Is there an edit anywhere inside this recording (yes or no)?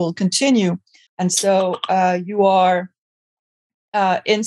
yes